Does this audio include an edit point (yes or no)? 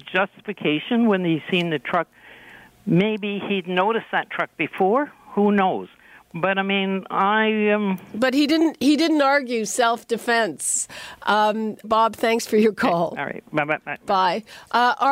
yes